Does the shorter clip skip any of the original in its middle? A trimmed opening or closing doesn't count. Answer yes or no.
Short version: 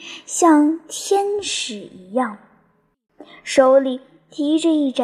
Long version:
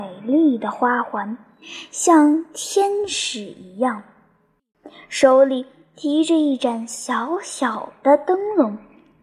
no